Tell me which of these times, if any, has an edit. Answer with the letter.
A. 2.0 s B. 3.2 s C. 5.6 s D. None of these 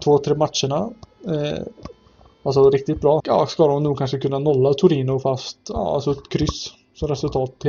B